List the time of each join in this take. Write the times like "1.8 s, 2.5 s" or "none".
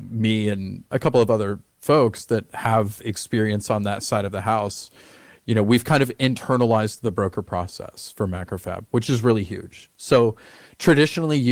none